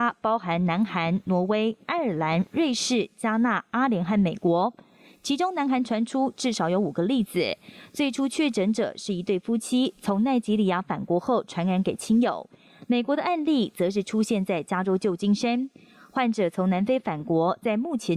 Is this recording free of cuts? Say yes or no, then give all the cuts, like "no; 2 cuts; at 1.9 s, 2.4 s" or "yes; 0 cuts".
yes; 0 cuts